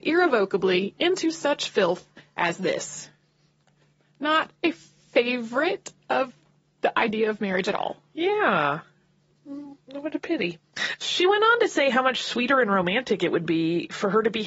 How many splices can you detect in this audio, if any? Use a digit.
0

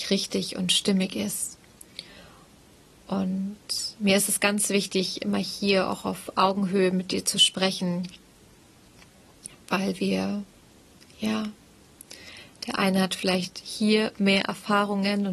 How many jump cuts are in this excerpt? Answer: 0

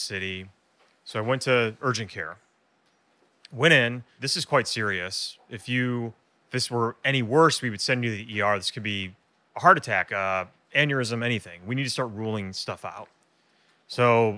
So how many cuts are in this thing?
2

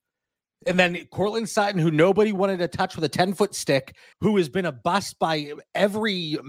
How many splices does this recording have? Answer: 1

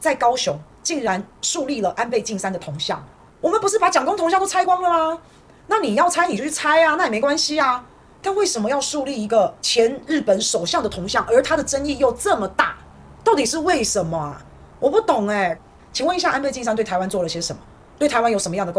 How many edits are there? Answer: 3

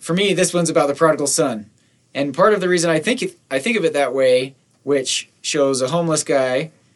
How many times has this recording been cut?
1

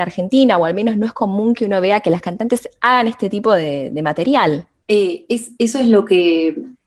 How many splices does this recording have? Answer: 1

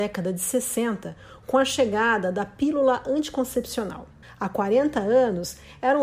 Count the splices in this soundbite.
1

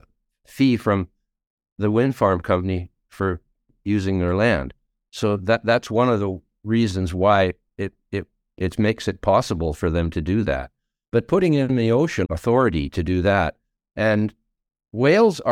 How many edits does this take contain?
1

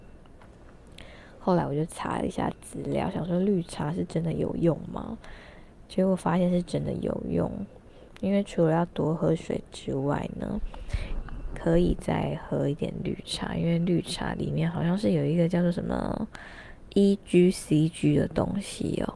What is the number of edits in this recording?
0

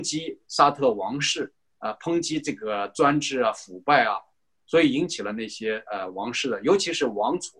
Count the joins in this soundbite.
0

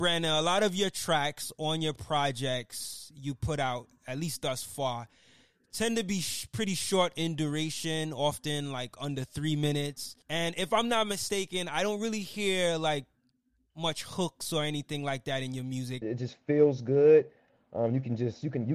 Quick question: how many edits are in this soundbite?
2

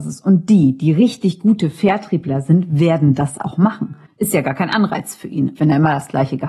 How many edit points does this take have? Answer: 2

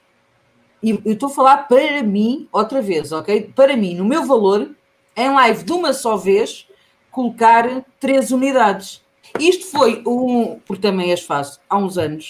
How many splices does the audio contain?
2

